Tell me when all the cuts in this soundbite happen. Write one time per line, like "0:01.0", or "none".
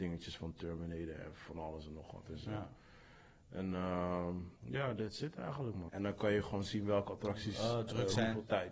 0:04.6
0:05.9